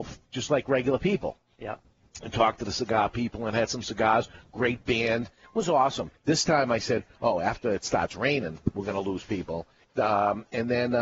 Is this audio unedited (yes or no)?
no